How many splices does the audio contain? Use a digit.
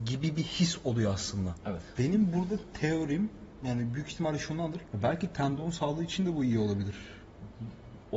2